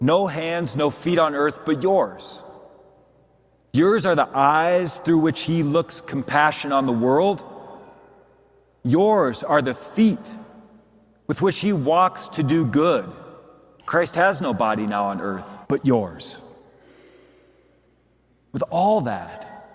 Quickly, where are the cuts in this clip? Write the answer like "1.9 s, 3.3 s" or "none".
13.8 s, 15.6 s